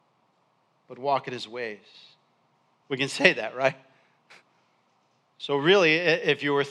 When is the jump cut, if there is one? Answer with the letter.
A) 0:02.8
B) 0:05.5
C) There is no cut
A